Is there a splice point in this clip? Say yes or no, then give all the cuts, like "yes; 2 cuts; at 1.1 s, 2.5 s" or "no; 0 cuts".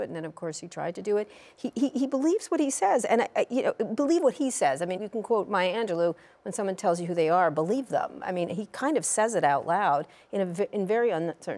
yes; 1 cut; at 5.0 s